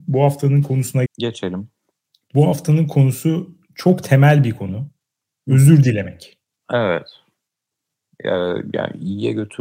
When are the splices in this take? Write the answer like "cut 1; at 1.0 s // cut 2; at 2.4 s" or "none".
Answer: cut 1; at 1.1 s // cut 2; at 6.6 s